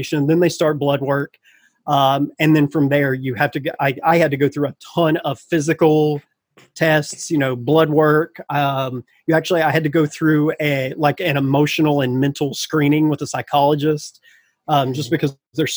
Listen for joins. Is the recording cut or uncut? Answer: uncut